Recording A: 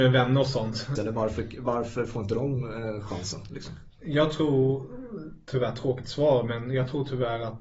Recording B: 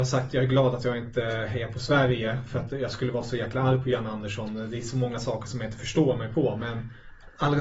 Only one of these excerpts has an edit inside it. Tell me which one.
A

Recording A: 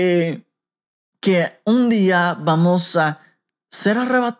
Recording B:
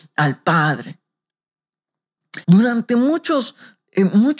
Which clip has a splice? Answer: B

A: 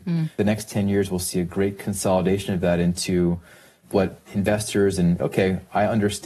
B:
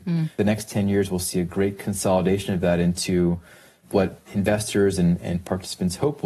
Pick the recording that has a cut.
A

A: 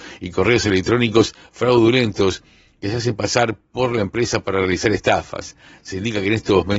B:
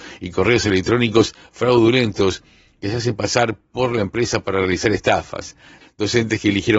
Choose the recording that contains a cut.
B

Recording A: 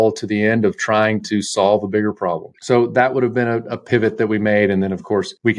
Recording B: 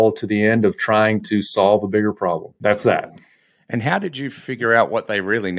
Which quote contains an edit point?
A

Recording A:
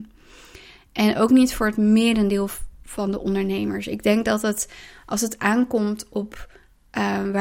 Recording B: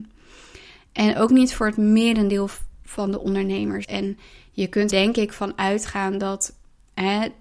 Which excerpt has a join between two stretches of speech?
B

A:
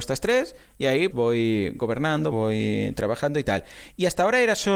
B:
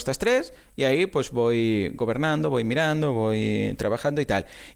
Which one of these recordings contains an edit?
A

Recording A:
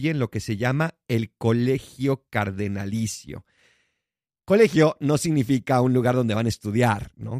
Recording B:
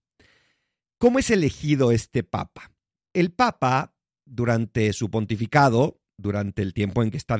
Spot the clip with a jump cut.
B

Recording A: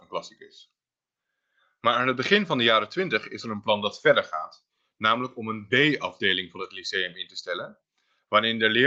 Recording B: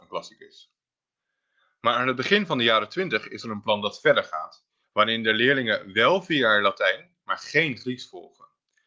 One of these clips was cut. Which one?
B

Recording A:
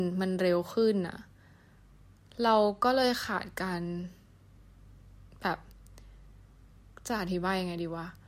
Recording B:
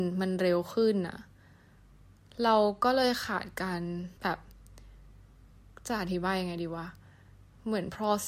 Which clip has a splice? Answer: B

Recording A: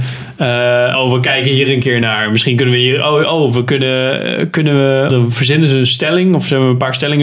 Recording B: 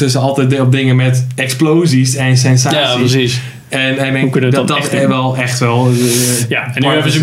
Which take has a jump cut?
A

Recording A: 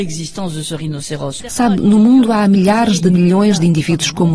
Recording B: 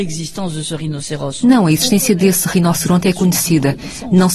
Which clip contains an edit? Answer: A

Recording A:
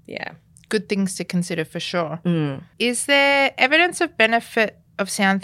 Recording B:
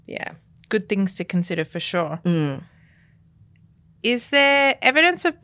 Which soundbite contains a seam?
A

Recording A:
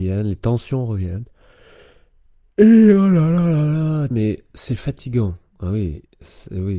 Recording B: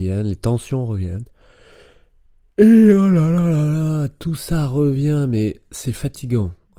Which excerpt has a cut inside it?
A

